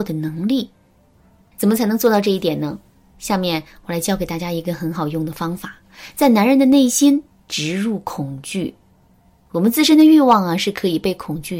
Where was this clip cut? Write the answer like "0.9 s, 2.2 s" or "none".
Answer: none